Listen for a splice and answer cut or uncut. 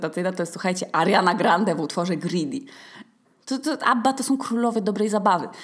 cut